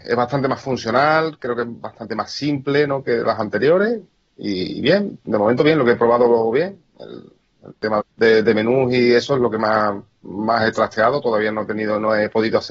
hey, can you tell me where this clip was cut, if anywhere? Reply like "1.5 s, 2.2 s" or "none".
8.0 s